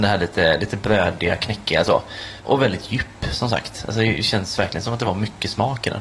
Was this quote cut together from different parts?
no; 0 cuts

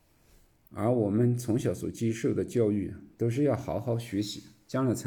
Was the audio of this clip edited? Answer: no; 0 cuts

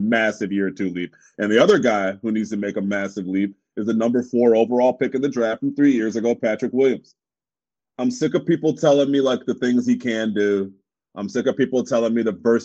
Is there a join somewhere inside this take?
no; 0 cuts

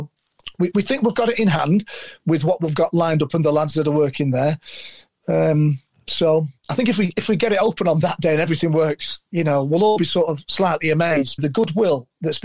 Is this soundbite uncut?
no; 1 cut; at 11.4 s

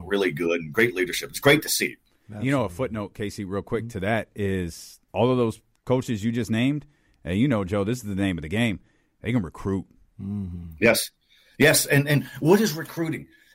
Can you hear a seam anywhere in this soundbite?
yes; 1 cut; at 5.1 s

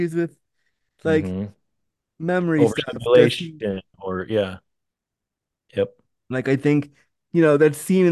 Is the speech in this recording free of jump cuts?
yes; 0 cuts

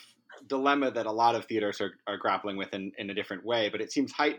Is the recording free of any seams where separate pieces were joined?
yes; 0 cuts

